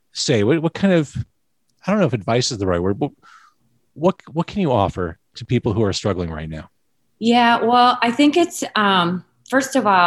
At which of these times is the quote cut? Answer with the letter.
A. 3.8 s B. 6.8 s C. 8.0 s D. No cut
D